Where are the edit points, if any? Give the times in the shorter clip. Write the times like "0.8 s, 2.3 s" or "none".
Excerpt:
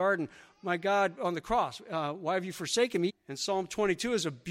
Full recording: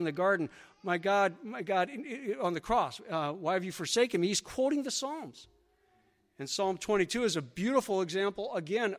1.2 s, 3.1 s